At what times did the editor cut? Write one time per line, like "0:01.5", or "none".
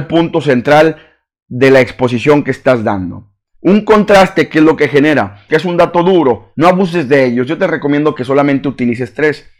0:03.5
0:05.5
0:06.5

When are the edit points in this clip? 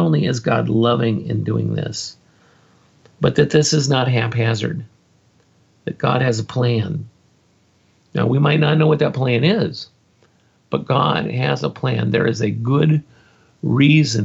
none

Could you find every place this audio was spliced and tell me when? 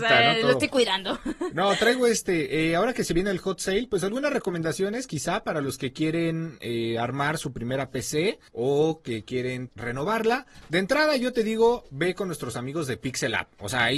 0:08.5
0:09.7

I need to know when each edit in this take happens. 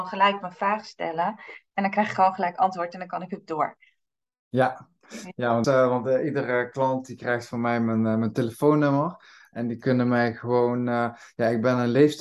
0:05.6

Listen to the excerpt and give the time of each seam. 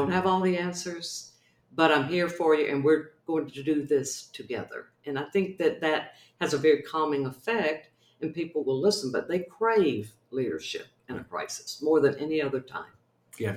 none

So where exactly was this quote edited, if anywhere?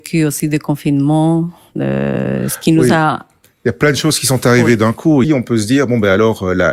0:05.2

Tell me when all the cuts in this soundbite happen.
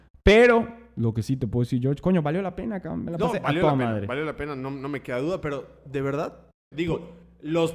0:06.7

